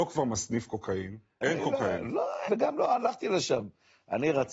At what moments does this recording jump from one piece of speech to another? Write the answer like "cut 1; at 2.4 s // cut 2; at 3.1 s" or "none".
cut 1; at 1.4 s // cut 2; at 2.5 s